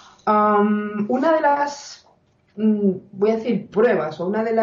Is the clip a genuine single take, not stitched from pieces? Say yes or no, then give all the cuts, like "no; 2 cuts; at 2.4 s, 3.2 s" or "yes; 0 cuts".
yes; 0 cuts